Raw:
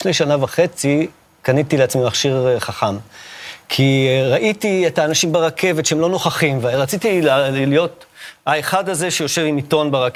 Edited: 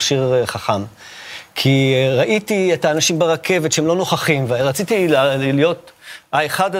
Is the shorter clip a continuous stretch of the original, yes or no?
yes